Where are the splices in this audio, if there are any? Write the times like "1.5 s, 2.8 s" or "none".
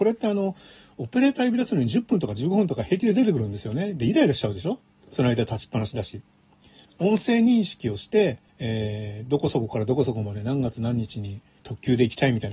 6.9 s, 8.5 s